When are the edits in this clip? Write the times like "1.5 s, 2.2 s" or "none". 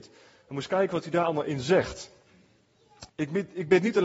3.1 s